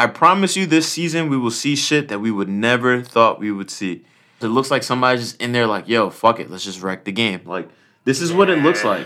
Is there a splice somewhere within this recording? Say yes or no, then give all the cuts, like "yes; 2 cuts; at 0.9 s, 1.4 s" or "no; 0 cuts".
yes; 1 cut; at 4.4 s